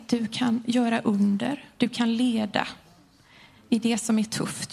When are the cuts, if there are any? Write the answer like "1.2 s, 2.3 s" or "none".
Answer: none